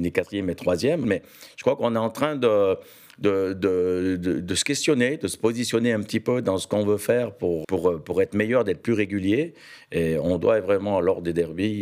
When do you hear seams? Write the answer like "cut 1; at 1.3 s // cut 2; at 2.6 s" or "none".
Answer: cut 1; at 1.0 s // cut 2; at 7.6 s